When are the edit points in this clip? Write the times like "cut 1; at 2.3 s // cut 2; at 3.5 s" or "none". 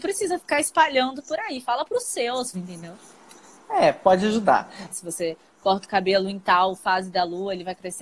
cut 1; at 2.5 s // cut 2; at 4.9 s